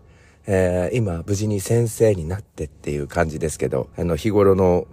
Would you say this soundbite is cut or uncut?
cut